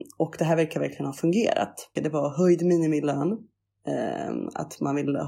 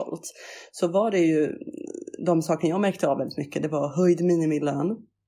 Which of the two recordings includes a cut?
first; 1 cut; at 2.0 s

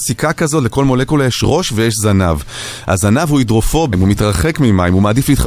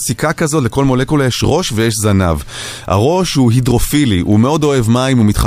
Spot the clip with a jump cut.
first; 2 cuts; at 2.8 s, 3.9 s

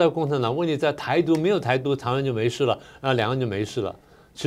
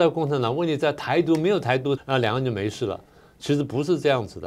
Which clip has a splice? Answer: second; 1 cut; at 2.0 s

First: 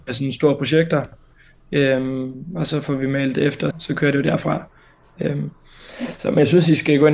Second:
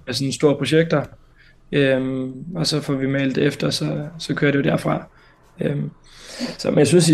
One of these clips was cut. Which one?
first; 1 cut; at 3.7 s

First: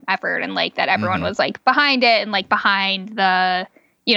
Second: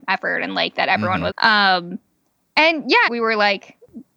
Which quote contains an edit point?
second; 2 cuts; at 1.3 s, 3.1 s

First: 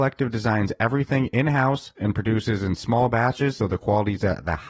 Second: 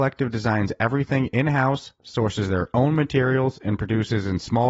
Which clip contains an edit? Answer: first; 2 cuts; at 2.0 s, 3.6 s

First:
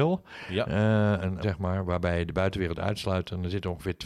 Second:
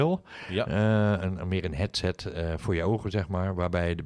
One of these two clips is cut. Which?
first; 1 cut; at 1.4 s

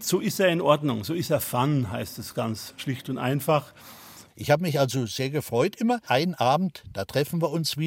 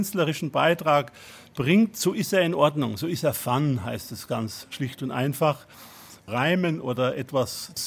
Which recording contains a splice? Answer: first; 2 cuts; at 4.3 s, 6.0 s

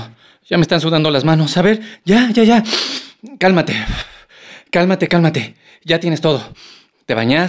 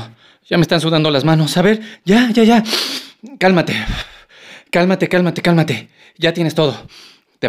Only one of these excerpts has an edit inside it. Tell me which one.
first; 1 cut; at 5.1 s

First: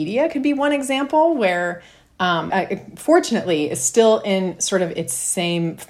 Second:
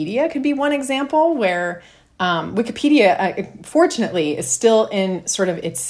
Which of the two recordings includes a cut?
first; 1 cut; at 2.5 s

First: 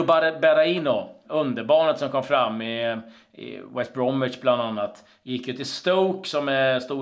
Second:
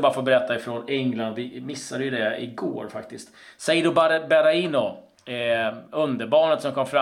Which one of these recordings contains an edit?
first; 1 cut; at 1.2 s

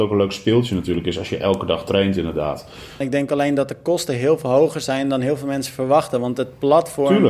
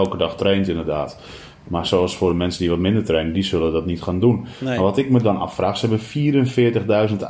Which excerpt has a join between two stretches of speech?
first; 1 cut; at 3.0 s

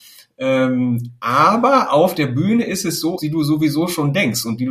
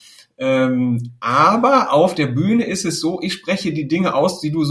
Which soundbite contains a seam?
first; 1 cut; at 3.2 s

